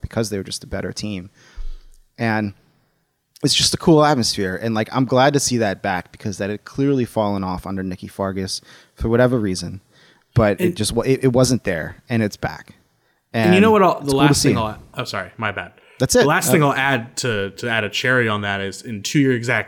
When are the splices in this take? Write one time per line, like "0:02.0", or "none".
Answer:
none